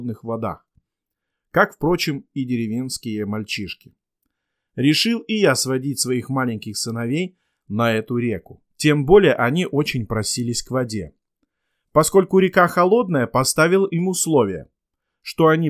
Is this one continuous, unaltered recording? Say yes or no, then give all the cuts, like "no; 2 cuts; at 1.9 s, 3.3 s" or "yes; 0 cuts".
no; 1 cut; at 8.7 s